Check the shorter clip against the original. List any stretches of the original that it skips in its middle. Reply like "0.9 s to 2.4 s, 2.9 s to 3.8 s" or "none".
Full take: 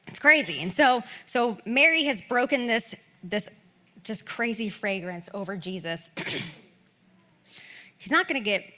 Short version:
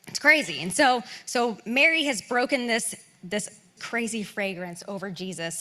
3.8 s to 4.2 s